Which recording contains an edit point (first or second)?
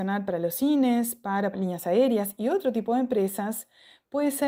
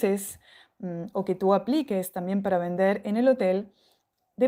first